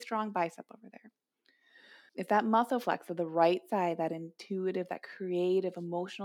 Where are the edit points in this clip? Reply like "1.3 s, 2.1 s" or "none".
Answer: 2.1 s